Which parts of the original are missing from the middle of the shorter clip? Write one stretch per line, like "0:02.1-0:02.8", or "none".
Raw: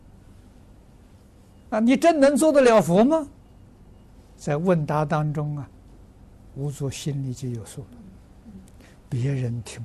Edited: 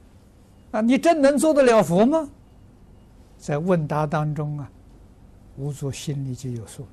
none